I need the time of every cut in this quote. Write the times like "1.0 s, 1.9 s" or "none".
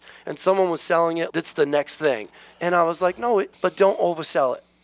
1.3 s, 3.5 s